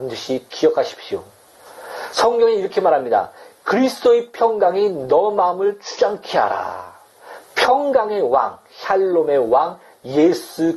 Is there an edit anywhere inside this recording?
no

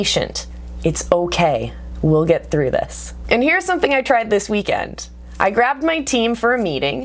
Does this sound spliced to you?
yes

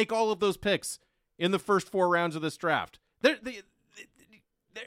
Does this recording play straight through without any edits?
yes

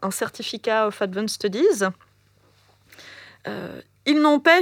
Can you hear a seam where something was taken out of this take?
no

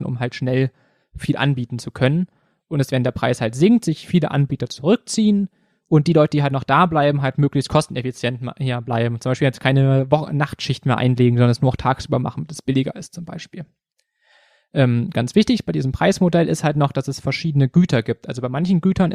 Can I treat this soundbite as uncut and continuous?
yes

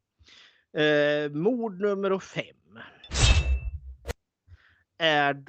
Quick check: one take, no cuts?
yes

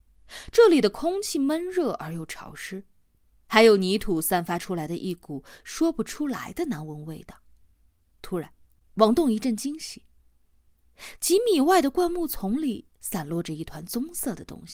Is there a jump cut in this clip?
no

